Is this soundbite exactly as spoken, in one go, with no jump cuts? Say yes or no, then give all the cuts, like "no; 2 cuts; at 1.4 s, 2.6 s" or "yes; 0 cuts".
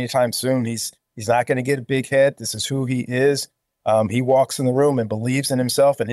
yes; 0 cuts